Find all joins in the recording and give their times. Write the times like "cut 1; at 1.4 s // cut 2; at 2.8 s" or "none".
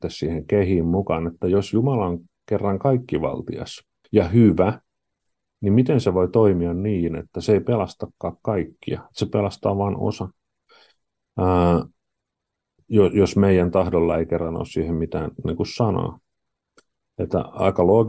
none